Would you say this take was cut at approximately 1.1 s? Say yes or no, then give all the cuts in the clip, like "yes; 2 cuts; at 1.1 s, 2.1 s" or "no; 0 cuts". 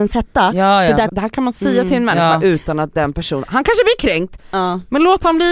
yes; 1 cut; at 1.1 s